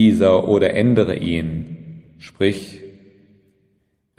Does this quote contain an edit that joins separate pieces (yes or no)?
no